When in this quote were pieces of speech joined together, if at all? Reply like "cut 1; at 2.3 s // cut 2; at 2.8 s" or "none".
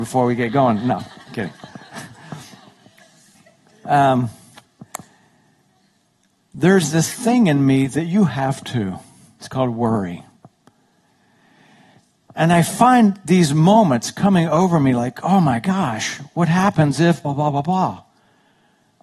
cut 1; at 17.2 s

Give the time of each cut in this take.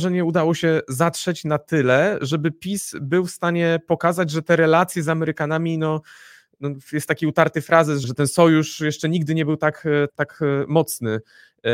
cut 1; at 8.0 s // cut 2; at 10.1 s

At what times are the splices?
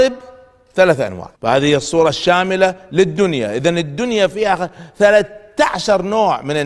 cut 1; at 1.3 s

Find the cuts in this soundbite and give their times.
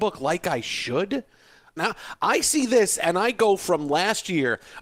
cut 1; at 1.8 s

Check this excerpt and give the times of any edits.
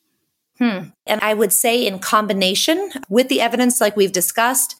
cut 1; at 1.1 s

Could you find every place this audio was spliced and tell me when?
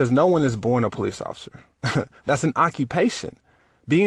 none

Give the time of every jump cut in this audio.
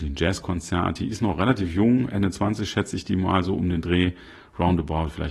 none

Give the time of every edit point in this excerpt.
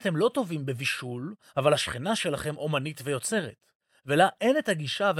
cut 1; at 1.4 s

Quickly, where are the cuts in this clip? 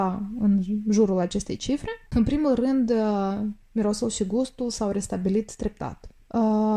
cut 1; at 2.1 s

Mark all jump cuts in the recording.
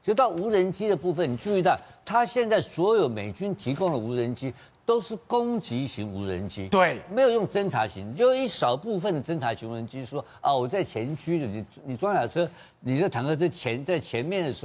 none

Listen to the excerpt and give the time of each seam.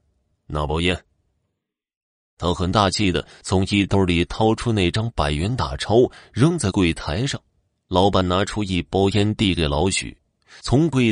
none

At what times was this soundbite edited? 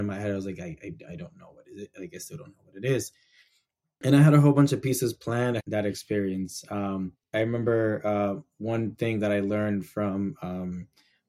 cut 1; at 5.6 s

